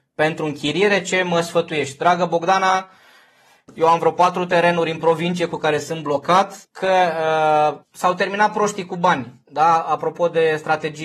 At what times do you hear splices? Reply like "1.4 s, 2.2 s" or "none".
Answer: 6.6 s, 7.8 s